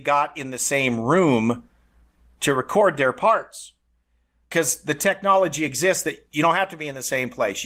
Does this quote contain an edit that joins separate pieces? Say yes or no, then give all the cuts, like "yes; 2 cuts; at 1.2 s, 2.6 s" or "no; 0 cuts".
no; 0 cuts